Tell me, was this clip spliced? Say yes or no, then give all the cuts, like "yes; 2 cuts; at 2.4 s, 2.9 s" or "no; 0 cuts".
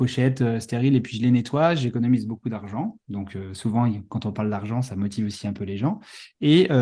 no; 0 cuts